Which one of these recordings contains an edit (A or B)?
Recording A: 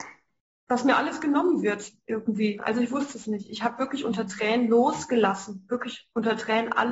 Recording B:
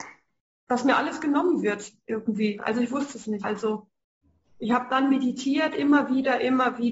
B